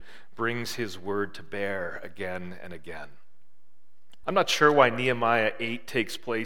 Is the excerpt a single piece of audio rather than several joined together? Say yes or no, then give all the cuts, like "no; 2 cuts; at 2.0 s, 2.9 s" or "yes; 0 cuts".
no; 1 cut; at 4.2 s